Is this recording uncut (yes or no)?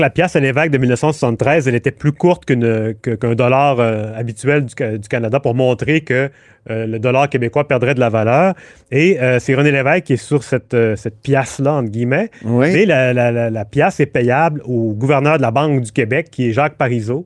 yes